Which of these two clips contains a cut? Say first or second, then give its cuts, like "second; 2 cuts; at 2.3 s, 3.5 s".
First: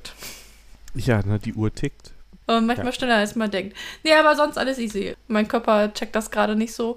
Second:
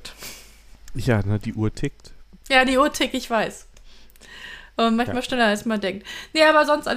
first; 2 cuts; at 2.4 s, 5.1 s